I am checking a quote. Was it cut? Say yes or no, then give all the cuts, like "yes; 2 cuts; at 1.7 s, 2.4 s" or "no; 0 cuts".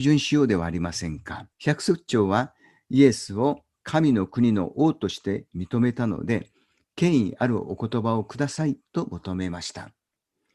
yes; 1 cut; at 1.5 s